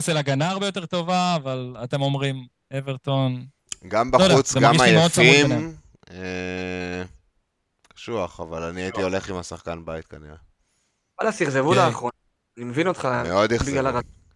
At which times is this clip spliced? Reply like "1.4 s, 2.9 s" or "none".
none